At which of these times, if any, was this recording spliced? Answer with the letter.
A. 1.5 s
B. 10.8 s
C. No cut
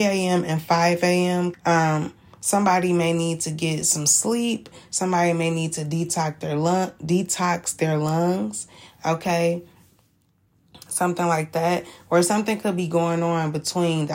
A